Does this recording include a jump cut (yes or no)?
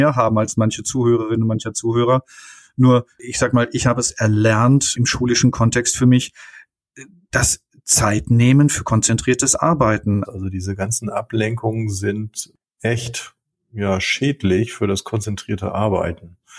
yes